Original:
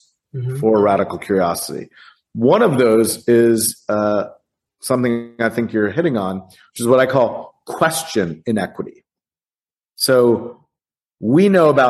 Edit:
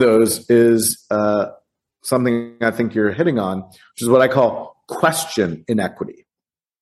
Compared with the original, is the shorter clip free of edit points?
yes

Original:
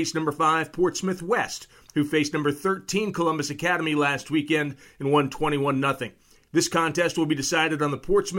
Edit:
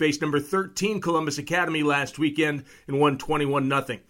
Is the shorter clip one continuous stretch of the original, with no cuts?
yes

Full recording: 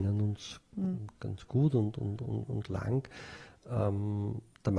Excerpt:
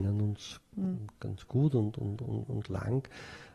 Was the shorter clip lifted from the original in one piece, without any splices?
yes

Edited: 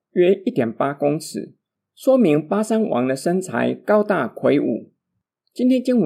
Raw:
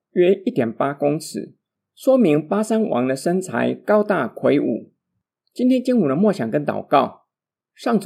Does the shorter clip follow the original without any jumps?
yes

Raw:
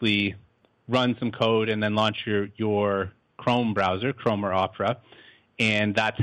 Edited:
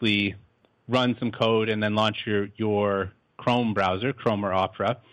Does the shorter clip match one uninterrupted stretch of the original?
yes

